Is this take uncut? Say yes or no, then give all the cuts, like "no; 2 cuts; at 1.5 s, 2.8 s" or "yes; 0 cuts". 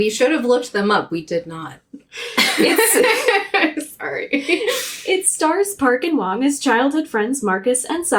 yes; 0 cuts